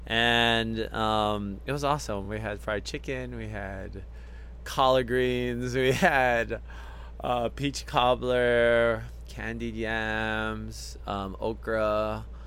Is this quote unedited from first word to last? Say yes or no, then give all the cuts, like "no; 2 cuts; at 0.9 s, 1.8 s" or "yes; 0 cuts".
yes; 0 cuts